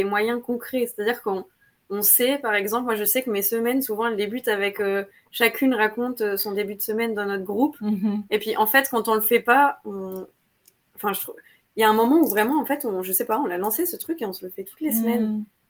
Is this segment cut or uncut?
uncut